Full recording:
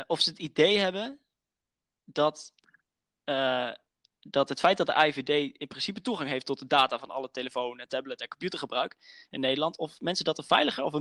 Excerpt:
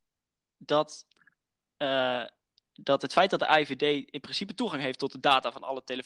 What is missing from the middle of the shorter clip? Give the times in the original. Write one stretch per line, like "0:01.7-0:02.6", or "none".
none